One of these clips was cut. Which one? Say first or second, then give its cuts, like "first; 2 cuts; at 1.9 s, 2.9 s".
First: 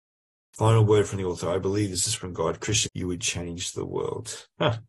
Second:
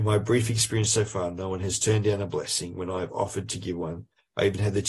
first; 1 cut; at 2.9 s